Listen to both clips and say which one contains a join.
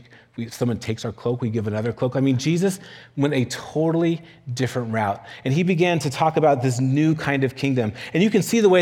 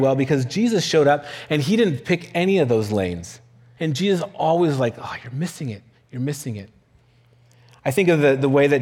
second; 1 cut; at 3.8 s

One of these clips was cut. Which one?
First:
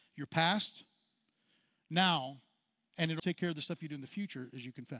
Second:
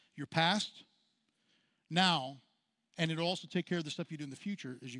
first; 1 cut; at 3.2 s

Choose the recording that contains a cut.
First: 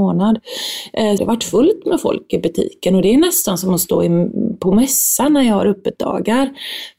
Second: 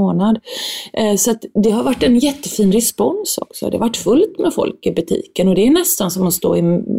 first; 1 cut; at 1.2 s

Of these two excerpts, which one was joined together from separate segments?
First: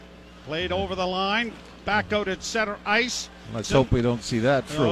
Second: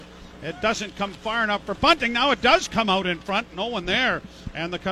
first; 1 cut; at 3.6 s

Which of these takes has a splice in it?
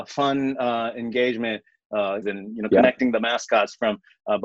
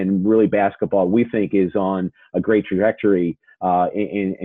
first; 1 cut; at 2.2 s

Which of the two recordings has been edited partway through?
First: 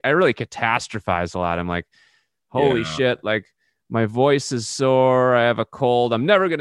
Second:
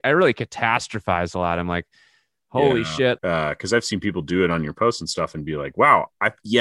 second; 1 cut; at 3.2 s

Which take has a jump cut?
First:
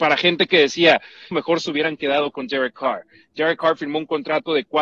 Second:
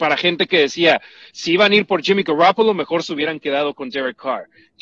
first; 1 cut; at 1.3 s

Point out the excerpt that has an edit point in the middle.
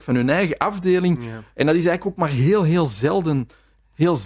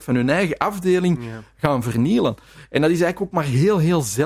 first; 1 cut; at 1.5 s

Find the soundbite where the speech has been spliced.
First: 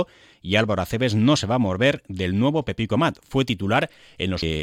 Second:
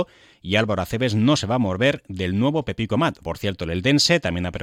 second; 1 cut; at 3.2 s

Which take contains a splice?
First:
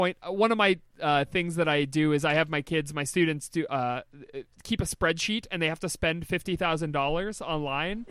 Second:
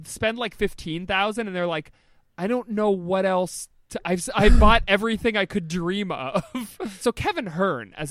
second; 1 cut; at 7.0 s

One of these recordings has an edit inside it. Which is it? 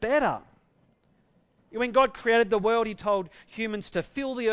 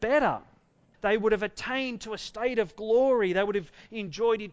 second; 1 cut; at 0.9 s

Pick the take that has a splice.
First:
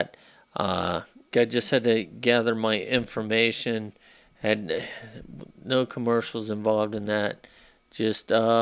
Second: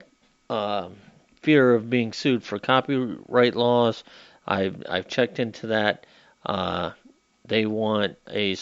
first; 1 cut; at 1.3 s

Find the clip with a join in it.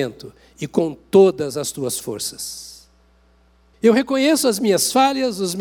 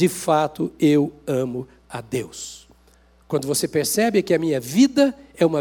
first; 1 cut; at 3.7 s

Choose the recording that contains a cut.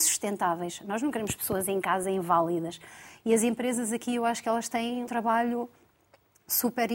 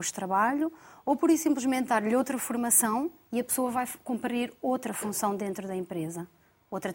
first; 2 cuts; at 3.2 s, 5.1 s

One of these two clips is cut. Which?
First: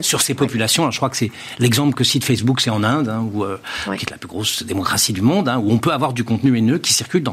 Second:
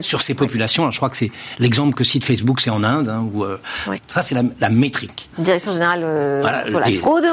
second; 2 cuts; at 4.0 s, 5.3 s

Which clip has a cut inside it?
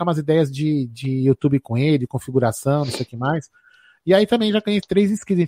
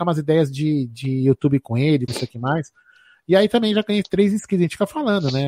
second; 1 cut; at 2.1 s

